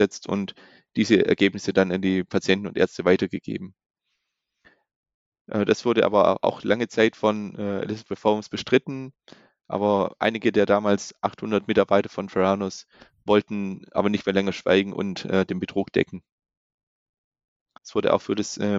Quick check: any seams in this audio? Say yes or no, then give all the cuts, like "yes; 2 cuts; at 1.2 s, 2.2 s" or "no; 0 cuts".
yes; 1 cut; at 17.8 s